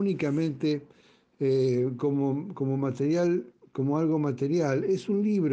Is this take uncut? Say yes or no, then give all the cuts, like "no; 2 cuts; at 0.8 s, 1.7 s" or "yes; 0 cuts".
yes; 0 cuts